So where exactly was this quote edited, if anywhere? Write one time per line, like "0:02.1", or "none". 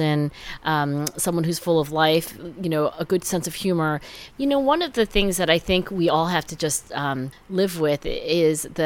0:04.3